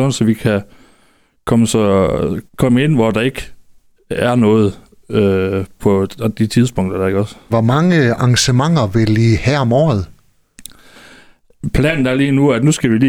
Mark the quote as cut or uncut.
cut